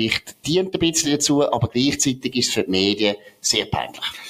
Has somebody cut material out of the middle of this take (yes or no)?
no